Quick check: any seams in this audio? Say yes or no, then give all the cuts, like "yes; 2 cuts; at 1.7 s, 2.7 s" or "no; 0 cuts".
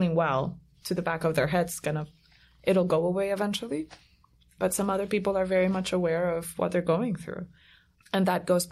no; 0 cuts